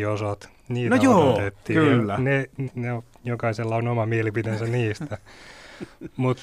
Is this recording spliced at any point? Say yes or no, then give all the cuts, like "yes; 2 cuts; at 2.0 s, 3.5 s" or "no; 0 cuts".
yes; 1 cut; at 2.7 s